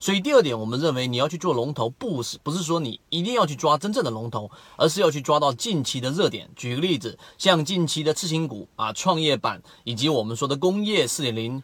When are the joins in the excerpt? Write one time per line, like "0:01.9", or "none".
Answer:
none